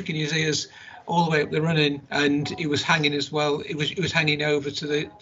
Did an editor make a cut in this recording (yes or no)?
yes